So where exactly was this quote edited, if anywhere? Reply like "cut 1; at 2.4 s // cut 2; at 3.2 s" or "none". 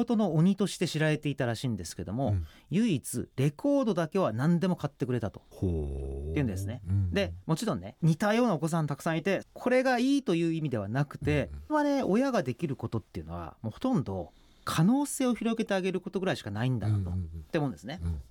cut 1; at 9.4 s // cut 2; at 11.7 s